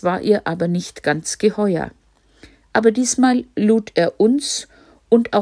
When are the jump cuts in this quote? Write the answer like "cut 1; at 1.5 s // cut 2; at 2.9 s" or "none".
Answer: cut 1; at 2.6 s